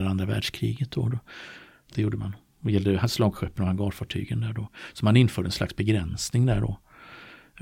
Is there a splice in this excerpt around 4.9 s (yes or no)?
no